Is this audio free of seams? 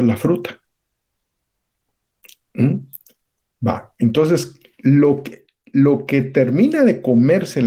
yes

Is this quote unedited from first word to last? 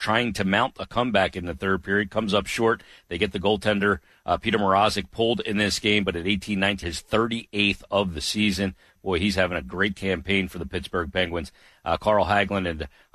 no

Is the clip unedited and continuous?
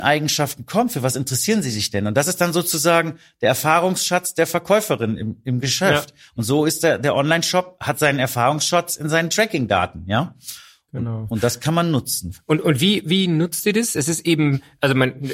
yes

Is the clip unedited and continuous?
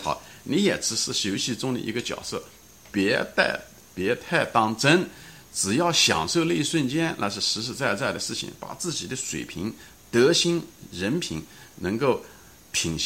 yes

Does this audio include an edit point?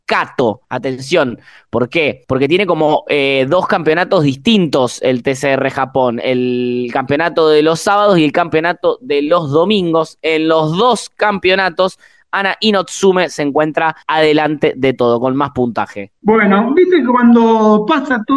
no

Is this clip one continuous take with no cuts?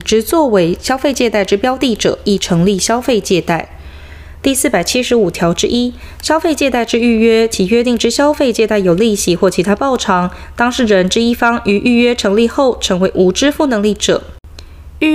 yes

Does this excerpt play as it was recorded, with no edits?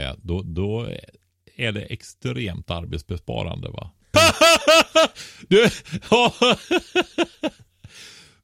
no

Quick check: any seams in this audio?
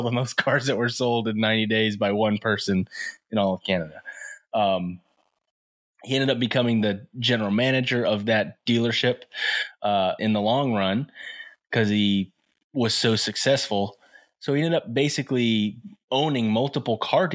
yes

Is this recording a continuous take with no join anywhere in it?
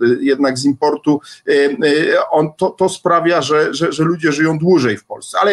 yes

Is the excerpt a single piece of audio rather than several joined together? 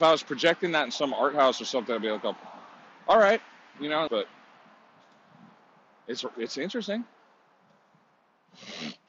no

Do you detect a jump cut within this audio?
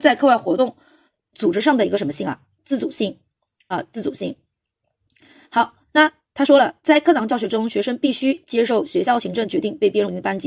no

